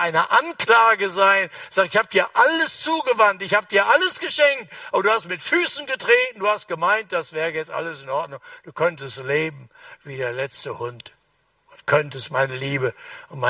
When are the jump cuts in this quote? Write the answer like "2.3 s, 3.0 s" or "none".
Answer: none